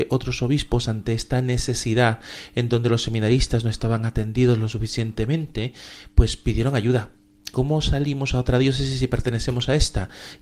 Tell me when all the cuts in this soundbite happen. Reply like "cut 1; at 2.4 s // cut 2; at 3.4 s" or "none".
cut 1; at 7.5 s